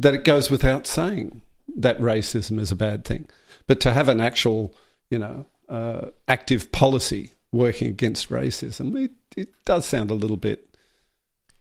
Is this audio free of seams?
yes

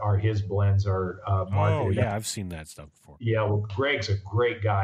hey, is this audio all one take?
yes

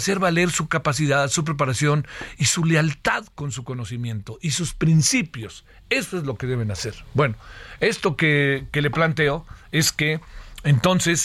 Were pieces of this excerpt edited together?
no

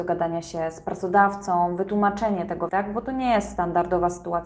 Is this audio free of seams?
no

